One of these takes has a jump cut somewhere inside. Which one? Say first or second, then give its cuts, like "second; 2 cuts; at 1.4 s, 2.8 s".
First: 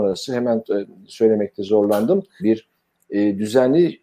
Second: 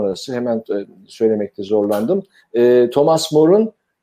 first; 1 cut; at 2.4 s